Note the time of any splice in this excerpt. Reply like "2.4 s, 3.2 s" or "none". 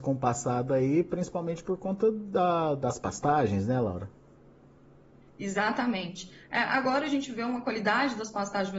none